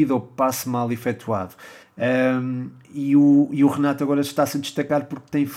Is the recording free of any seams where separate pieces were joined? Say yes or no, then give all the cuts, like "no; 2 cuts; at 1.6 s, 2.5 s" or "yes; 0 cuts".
no; 1 cut; at 1.8 s